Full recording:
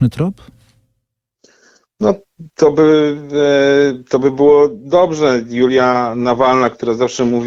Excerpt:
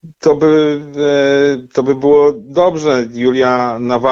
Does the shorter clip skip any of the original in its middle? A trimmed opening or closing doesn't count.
no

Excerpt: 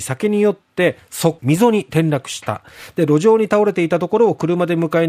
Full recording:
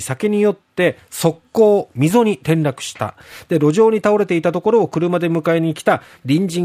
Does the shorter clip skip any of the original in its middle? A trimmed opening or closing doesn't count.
yes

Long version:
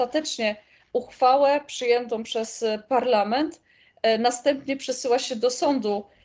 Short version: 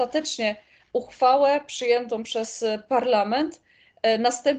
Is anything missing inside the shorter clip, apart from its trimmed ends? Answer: no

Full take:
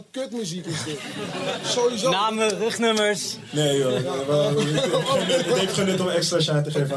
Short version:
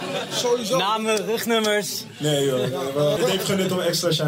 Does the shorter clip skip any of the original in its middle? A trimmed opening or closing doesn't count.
yes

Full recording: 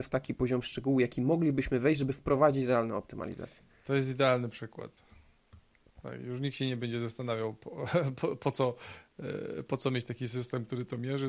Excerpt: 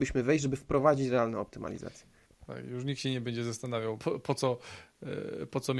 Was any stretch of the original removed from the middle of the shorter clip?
yes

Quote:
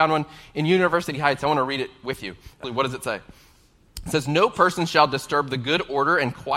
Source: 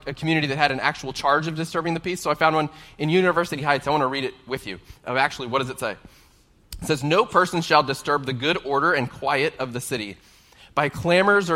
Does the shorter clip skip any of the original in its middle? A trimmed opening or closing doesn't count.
yes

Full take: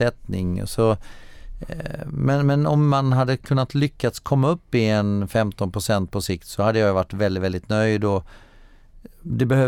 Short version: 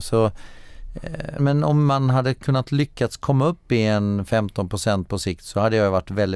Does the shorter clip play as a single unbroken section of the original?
no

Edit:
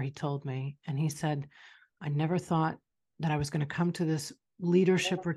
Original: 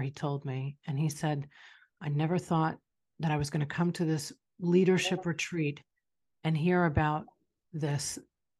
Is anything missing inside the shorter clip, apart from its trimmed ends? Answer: no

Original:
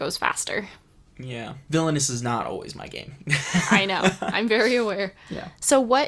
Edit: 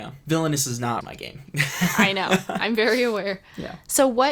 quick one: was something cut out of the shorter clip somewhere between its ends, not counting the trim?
yes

